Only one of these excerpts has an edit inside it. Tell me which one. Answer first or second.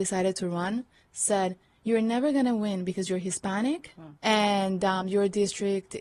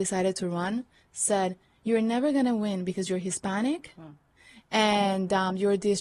first